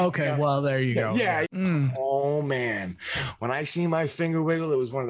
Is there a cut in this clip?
yes; 1 cut; at 1.4 s

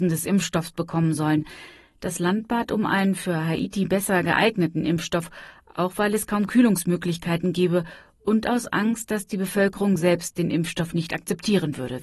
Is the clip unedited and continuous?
yes; 0 cuts

